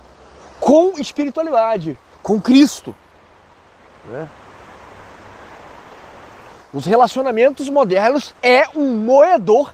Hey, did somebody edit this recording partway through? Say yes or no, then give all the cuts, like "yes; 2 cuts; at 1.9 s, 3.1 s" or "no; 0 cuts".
yes; 2 cuts; at 6.6 s, 8.4 s